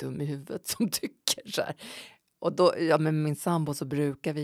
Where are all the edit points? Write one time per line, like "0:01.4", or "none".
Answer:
none